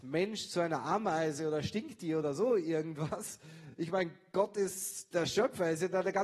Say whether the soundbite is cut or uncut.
uncut